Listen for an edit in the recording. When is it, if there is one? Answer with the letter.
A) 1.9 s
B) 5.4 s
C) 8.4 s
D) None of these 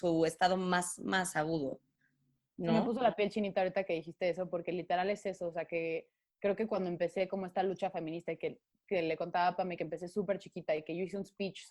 D